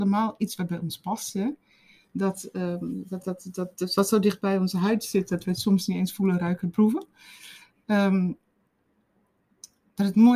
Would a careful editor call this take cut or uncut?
uncut